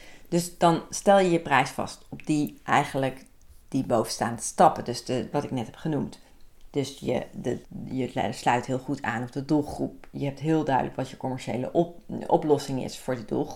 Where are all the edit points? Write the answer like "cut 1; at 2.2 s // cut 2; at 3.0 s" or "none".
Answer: cut 1; at 5.3 s // cut 2; at 7.6 s